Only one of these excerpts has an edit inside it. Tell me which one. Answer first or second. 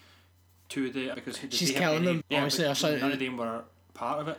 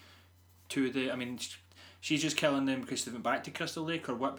first